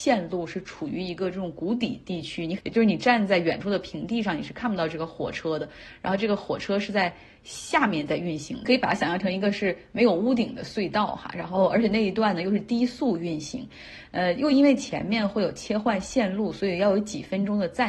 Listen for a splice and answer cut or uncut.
uncut